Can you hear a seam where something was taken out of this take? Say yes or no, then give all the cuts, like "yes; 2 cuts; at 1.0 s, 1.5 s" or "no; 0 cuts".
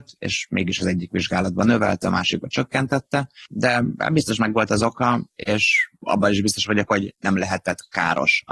no; 0 cuts